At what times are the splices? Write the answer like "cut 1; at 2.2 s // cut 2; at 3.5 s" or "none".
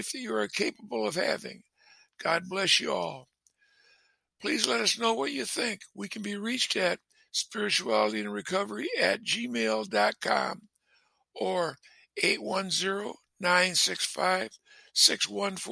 none